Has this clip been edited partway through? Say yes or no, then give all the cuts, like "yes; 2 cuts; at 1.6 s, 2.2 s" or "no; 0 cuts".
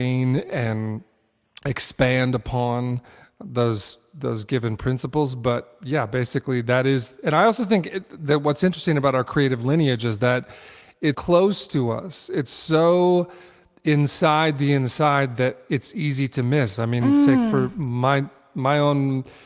yes; 1 cut; at 11.1 s